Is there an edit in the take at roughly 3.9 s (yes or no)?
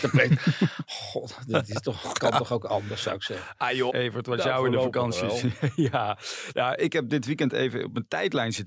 yes